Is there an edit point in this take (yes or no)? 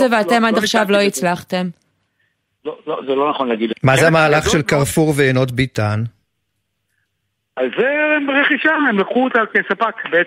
yes